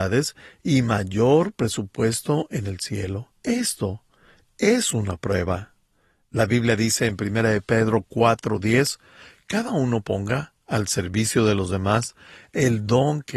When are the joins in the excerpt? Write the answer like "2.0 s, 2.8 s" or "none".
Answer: 3.4 s